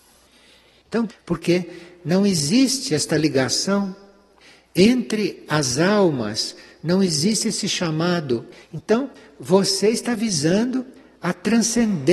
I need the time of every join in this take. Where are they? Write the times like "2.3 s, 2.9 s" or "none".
1.1 s, 8.6 s